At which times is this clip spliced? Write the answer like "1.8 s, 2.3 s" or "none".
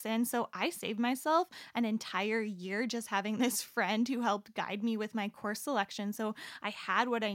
none